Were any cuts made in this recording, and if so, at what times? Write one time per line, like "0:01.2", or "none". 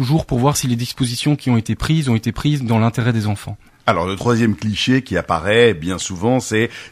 none